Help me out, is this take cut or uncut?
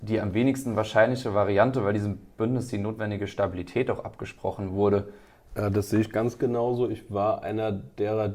cut